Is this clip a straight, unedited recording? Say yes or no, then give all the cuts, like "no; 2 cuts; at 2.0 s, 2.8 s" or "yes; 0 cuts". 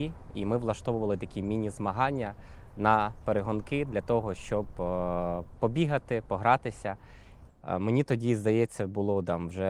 no; 1 cut; at 7.5 s